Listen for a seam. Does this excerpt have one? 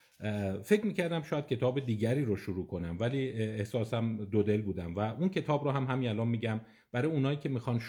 no; 0 cuts

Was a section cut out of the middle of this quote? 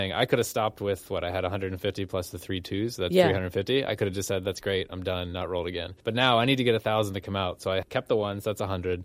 no; 0 cuts

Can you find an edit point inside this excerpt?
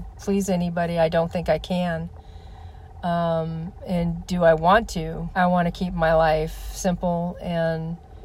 yes; 1 cut; at 5.3 s

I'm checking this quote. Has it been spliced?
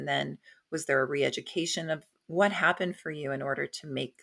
yes; 1 cut; at 2.2 s

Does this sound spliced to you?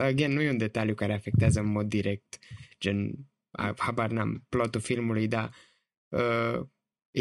no; 0 cuts

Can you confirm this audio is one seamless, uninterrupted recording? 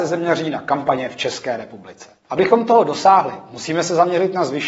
no; 1 cut; at 2.2 s

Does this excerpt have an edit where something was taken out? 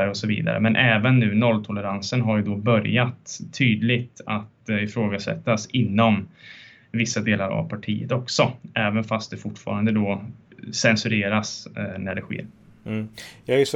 no; 0 cuts

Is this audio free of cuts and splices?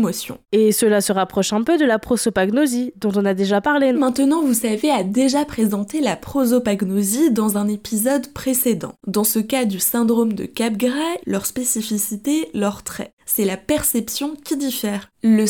no; 3 cuts; at 3.9 s, 9.0 s, 11.2 s

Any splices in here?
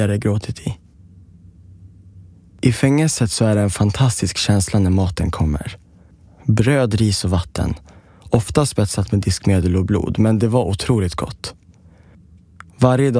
no; 0 cuts

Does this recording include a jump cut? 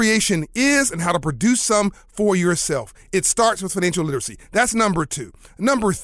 no; 0 cuts

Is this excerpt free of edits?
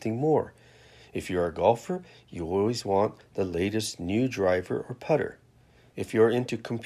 no; 1 cut; at 5.9 s

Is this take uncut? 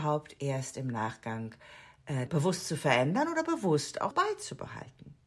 no; 2 cuts; at 2.3 s, 4.1 s

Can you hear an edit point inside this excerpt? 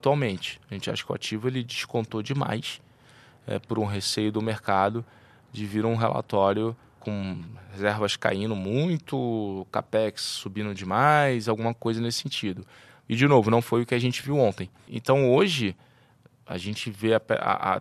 no; 0 cuts

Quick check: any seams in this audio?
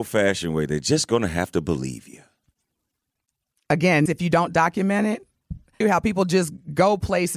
yes; 2 cuts; at 4.1 s, 5.8 s

